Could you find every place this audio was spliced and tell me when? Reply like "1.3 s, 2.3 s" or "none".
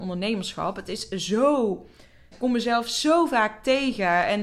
2.3 s